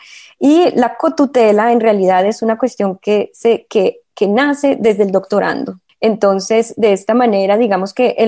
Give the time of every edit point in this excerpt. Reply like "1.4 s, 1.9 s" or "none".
5.9 s